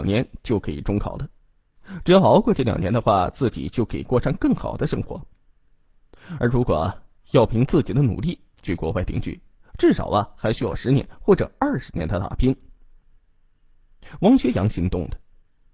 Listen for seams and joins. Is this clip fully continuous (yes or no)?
yes